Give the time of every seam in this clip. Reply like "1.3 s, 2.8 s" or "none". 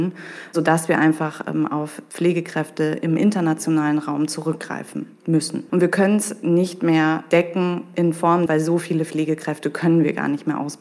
5.7 s, 8.5 s